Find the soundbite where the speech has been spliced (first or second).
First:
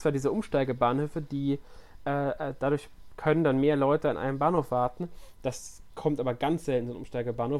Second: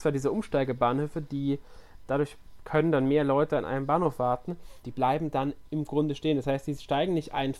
second